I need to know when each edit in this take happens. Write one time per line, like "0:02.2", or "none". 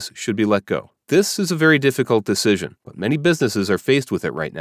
0:01.0
0:02.8

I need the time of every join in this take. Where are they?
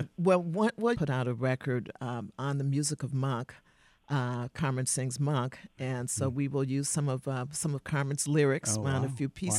0:00.9

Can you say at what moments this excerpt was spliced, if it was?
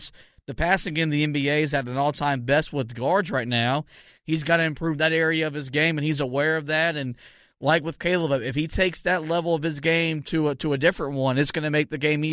none

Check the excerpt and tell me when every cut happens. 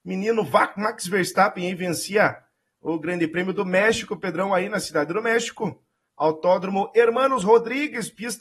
none

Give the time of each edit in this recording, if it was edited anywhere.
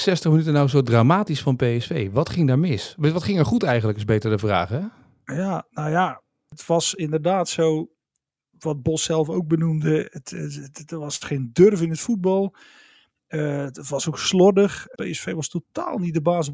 0:15.0

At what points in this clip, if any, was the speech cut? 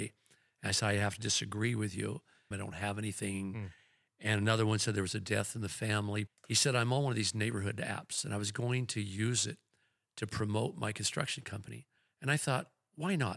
0:02.5
0:06.3

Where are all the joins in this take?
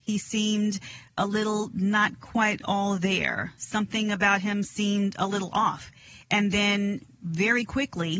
none

